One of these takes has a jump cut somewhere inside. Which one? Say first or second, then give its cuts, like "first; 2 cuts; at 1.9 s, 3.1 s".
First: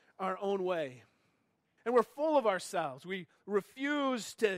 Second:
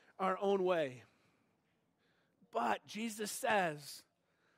first; 1 cut; at 1.8 s